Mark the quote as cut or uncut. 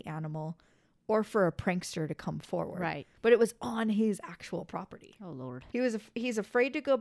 cut